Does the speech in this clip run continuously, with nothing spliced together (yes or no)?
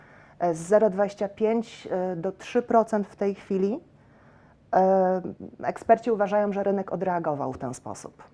yes